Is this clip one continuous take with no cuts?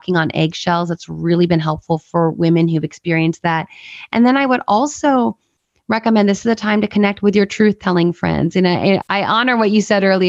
no; 1 cut; at 9.0 s

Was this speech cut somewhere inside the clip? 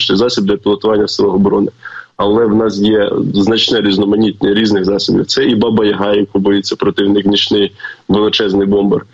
no; 0 cuts

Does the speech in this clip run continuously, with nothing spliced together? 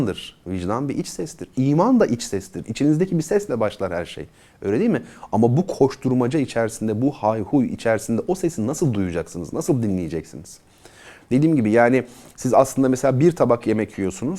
yes; 0 cuts

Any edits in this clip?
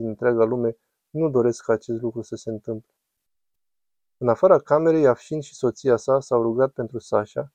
no; 0 cuts

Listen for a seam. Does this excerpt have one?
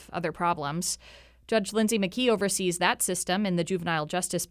no; 0 cuts

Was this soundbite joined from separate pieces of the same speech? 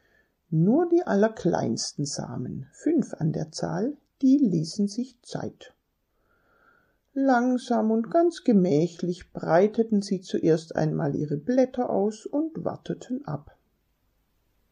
no; 0 cuts

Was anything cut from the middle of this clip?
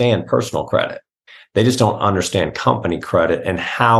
no; 0 cuts

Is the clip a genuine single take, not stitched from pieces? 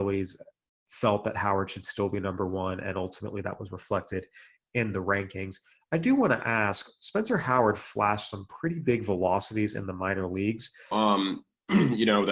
no; 1 cut; at 10.9 s

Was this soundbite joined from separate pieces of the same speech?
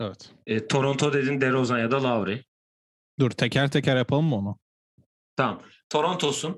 no; 0 cuts

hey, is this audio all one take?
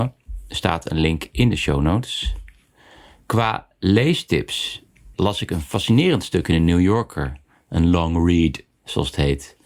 no; 1 cut; at 5.1 s

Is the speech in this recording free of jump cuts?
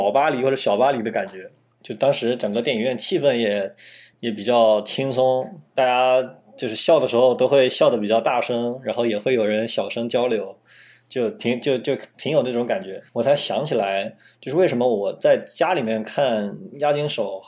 no; 1 cut; at 13.1 s

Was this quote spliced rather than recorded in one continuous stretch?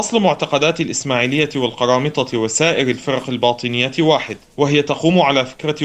no; 0 cuts

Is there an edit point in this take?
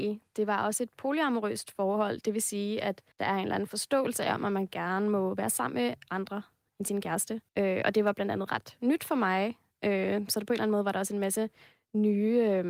yes; 2 cuts; at 3.1 s, 7.5 s

